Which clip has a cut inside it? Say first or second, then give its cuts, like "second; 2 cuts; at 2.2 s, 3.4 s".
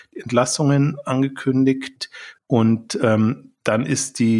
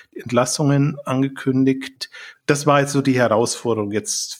first; 1 cut; at 2.4 s